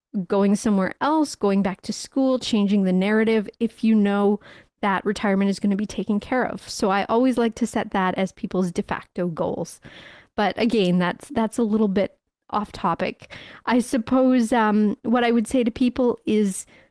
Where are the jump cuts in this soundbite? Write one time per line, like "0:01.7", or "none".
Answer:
none